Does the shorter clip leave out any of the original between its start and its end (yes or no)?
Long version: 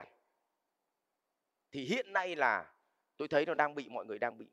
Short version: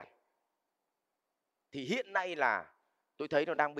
no